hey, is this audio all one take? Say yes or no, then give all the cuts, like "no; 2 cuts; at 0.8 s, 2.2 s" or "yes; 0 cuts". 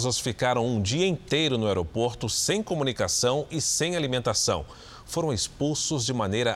yes; 0 cuts